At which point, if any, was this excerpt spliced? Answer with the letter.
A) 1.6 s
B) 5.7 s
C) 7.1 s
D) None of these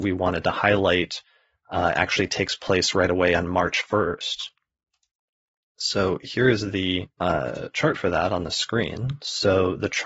C